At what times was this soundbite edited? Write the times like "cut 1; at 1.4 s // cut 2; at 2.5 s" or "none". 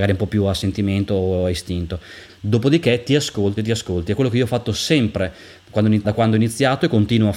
cut 1; at 2.3 s // cut 2; at 3.6 s // cut 3; at 6.0 s